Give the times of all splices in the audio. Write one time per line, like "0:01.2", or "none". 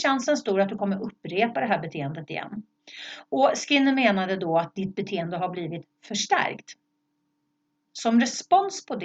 0:07.8